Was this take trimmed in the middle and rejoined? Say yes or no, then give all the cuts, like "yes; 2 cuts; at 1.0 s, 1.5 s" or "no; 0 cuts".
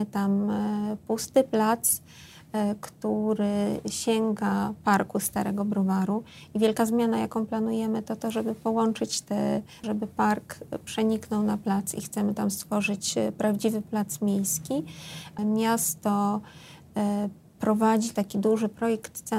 yes; 2 cuts; at 9.8 s, 15.4 s